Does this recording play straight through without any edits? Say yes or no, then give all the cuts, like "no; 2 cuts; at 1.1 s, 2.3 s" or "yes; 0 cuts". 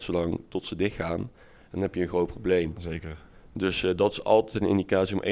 yes; 0 cuts